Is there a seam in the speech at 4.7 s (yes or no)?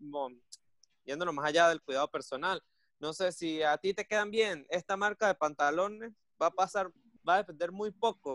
no